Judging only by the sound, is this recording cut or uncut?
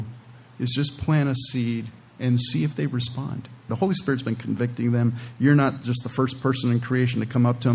cut